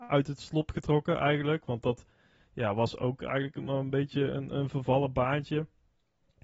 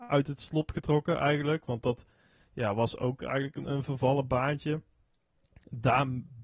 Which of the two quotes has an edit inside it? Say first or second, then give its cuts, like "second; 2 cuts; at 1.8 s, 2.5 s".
second; 1 cut; at 3.6 s